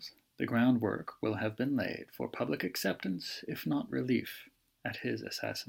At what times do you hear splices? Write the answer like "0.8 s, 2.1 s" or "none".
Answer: none

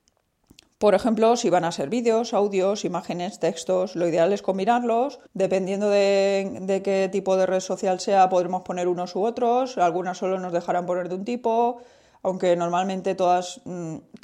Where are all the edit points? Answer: 5.3 s

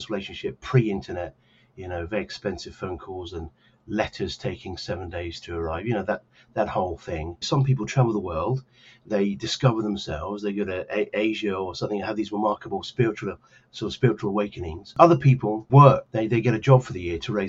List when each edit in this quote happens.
7.4 s

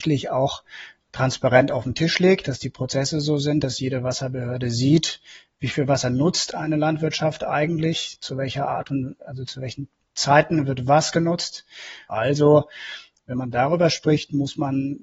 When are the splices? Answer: 12.1 s

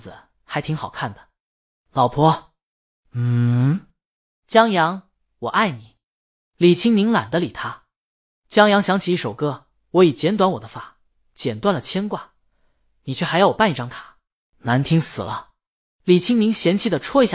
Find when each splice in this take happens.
none

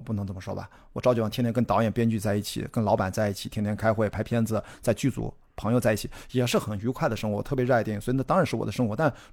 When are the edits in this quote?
none

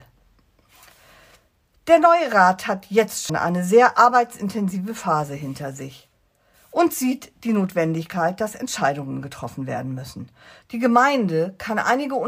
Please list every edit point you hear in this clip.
3.3 s, 10.6 s

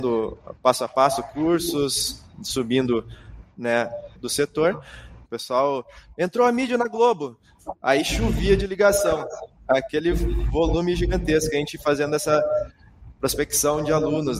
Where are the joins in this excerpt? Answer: 4.1 s, 5.2 s

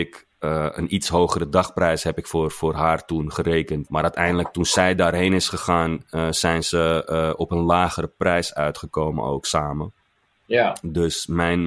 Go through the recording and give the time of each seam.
3.9 s

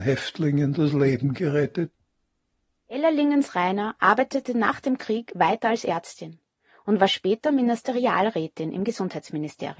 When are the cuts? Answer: none

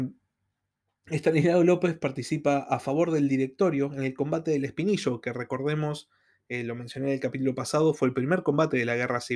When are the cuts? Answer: none

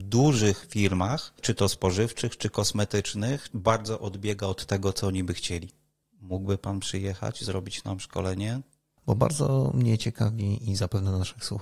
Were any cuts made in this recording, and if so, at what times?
3.5 s, 6.0 s, 9.0 s

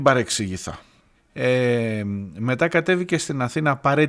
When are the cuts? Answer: 1.1 s

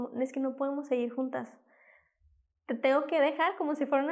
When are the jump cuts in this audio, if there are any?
none

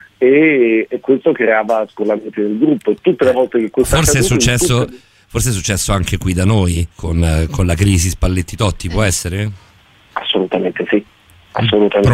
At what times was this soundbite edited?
6.9 s

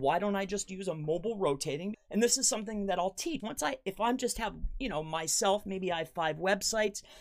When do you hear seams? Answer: 1.9 s, 3.4 s

